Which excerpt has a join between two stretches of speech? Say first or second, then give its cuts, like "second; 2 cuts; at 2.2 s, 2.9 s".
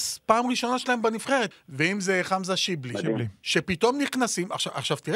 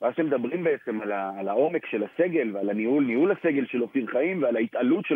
first; 1 cut; at 1.5 s